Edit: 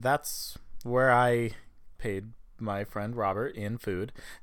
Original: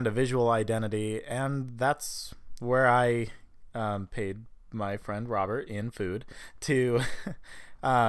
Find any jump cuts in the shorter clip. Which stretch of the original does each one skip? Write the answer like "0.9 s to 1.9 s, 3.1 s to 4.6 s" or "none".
3.7 s to 4.1 s